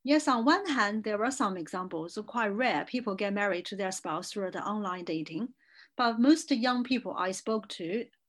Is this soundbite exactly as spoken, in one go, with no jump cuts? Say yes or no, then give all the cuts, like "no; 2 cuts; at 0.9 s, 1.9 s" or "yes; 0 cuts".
yes; 0 cuts